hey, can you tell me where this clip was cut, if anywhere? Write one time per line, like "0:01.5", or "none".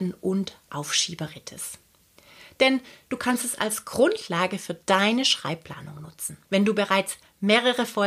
0:06.4